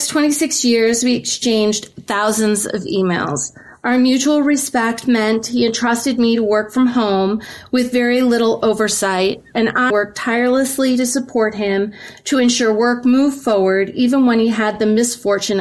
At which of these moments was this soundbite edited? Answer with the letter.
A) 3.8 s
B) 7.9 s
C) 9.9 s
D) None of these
C